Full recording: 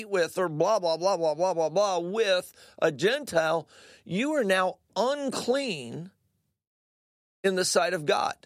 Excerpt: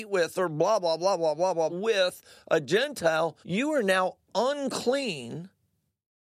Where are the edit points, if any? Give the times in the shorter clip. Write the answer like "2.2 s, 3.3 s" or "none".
1.7 s, 3.4 s